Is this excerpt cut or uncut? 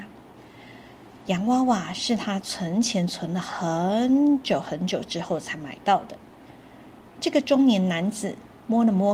cut